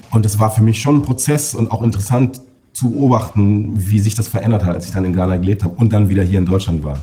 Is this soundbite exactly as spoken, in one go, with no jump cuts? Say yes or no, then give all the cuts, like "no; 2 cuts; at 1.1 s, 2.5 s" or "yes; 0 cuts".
yes; 0 cuts